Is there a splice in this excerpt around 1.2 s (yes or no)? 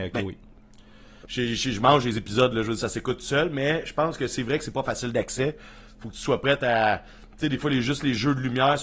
yes